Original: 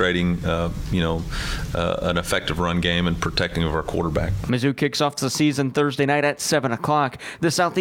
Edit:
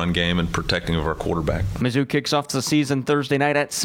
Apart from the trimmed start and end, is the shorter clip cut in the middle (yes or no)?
no